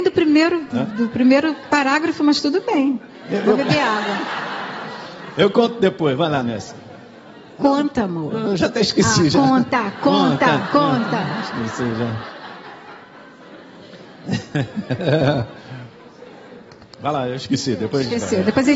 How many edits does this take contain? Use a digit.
0